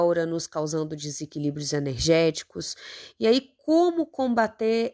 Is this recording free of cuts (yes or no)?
yes